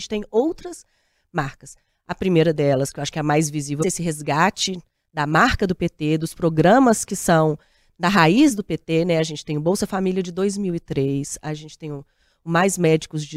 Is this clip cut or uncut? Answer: cut